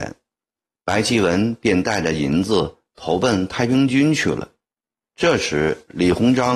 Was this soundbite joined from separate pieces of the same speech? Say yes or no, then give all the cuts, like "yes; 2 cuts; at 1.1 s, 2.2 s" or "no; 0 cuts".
yes; 1 cut; at 5.1 s